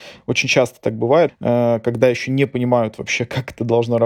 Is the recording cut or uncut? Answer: cut